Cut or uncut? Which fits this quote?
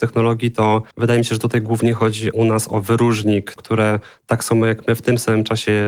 cut